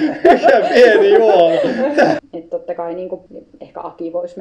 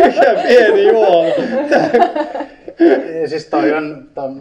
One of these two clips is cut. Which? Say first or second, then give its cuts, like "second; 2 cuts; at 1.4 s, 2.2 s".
first; 2 cuts; at 2.2 s, 3.3 s